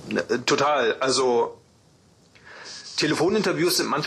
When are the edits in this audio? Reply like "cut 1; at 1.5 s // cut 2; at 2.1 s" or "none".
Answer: none